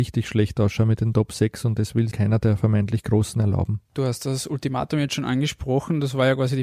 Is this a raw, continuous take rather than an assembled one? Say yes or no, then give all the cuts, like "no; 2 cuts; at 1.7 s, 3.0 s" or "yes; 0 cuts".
no; 1 cut; at 2.1 s